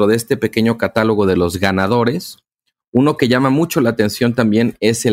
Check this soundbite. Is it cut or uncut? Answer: uncut